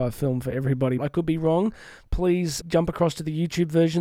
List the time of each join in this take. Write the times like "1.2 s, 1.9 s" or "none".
1.0 s, 2.6 s

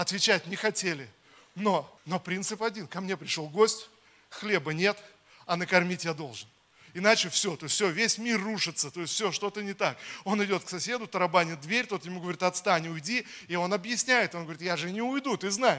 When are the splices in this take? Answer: 2.0 s

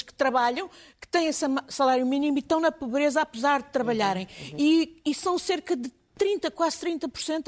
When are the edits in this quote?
none

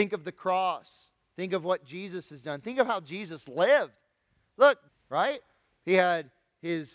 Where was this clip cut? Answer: 4.9 s

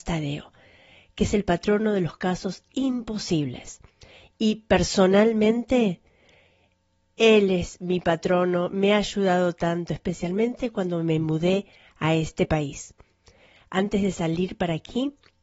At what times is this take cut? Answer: none

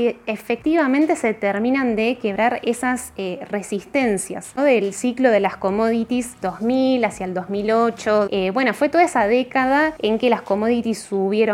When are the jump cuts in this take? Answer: 4.6 s, 6.4 s, 8.3 s

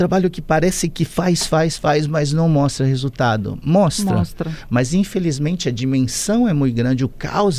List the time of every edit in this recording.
none

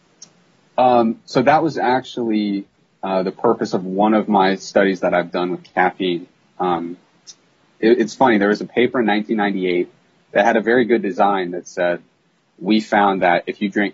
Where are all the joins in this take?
none

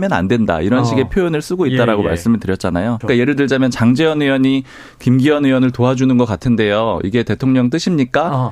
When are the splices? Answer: 3.0 s

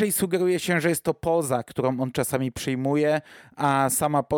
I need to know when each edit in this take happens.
none

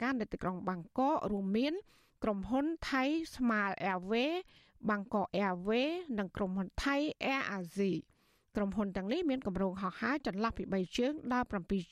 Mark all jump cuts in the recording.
none

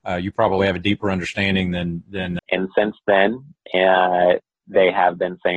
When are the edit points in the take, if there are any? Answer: 2.4 s

